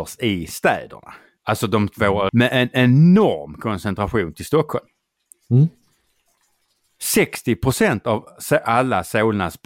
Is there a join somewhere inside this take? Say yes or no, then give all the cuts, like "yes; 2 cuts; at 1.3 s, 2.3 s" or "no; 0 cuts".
yes; 1 cut; at 2.3 s